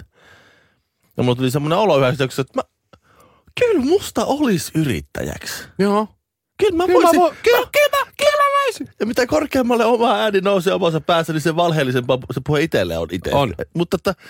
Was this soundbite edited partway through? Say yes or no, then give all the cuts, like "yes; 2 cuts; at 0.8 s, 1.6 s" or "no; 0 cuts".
no; 0 cuts